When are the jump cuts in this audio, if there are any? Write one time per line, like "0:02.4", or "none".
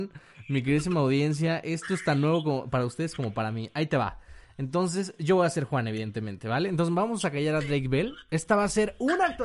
none